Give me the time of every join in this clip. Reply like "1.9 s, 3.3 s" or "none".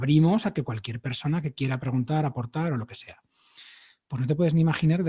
none